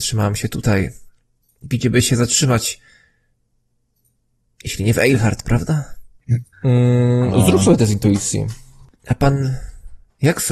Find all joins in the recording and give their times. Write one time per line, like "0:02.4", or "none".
0:06.5
0:08.9